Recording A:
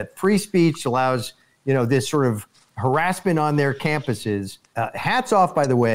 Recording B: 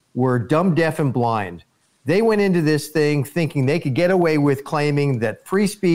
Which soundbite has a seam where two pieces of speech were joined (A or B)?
A